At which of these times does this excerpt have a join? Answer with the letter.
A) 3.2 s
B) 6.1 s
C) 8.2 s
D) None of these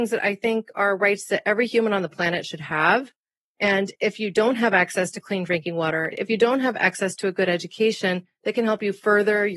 B